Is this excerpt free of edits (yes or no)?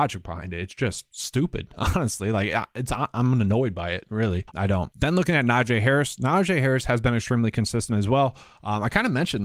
no